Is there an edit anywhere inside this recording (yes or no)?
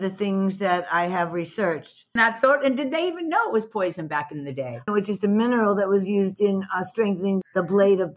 yes